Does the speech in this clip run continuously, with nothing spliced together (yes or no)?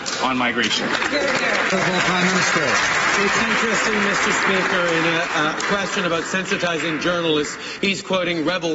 yes